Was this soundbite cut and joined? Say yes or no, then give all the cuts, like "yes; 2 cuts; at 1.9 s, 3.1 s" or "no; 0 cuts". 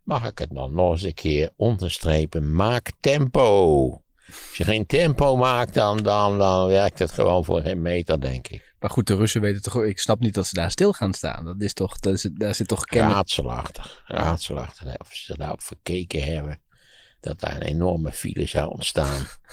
no; 0 cuts